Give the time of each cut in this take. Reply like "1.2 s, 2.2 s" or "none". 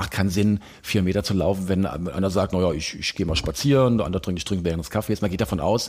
none